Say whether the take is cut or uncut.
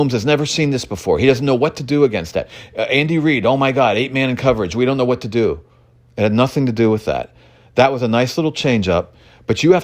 uncut